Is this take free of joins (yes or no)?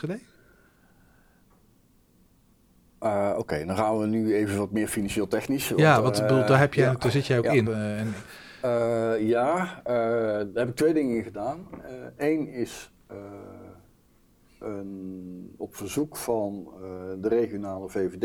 no